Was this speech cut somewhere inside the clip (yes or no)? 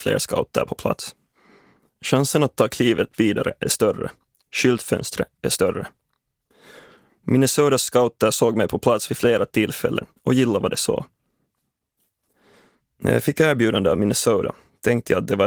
no